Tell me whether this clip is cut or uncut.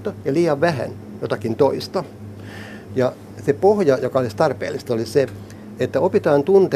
cut